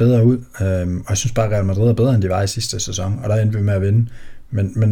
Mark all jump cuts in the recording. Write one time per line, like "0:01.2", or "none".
none